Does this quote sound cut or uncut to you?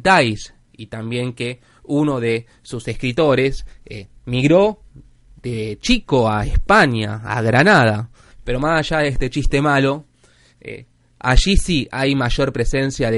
cut